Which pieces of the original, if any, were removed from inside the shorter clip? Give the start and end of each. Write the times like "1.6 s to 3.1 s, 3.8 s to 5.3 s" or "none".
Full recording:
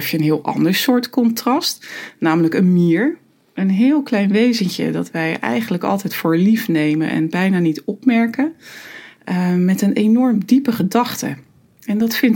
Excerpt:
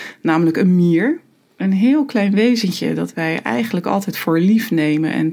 none